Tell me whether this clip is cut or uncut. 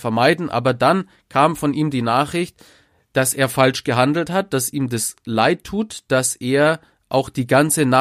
cut